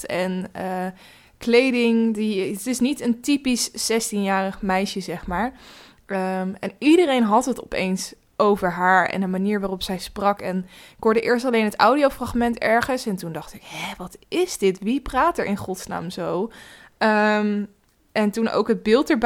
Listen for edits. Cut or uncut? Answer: uncut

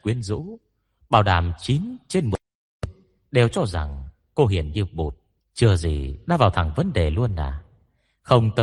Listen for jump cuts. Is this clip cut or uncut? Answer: cut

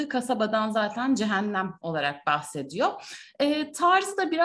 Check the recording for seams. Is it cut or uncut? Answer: uncut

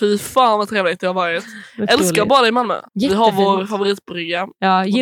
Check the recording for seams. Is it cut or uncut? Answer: cut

